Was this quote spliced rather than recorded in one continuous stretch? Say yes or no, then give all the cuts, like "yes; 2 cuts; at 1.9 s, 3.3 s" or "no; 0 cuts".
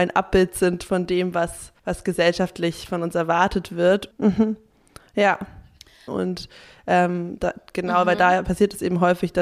yes; 3 cuts; at 1.8 s, 4.1 s, 6.1 s